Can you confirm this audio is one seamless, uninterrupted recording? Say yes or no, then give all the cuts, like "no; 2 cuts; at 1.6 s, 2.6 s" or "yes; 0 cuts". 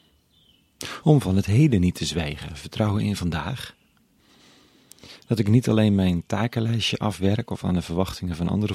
yes; 0 cuts